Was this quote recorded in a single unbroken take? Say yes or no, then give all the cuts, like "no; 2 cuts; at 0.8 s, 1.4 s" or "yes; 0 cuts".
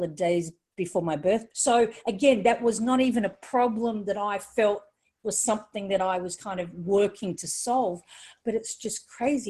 no; 1 cut; at 1.5 s